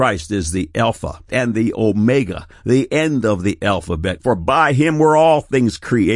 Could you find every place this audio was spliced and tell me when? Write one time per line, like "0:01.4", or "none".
0:01.3
0:04.2